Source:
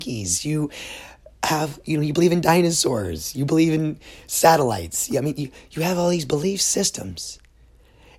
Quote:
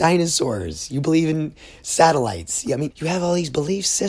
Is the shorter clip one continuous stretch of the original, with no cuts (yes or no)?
no